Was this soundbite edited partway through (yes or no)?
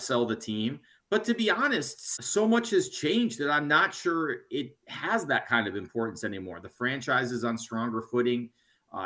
yes